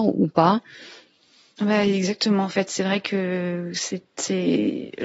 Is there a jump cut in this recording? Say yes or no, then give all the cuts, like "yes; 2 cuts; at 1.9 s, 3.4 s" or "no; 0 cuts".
no; 0 cuts